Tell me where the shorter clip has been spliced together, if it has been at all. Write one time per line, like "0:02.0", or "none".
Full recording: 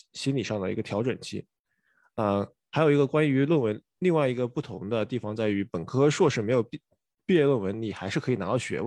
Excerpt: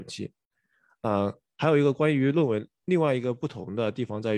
none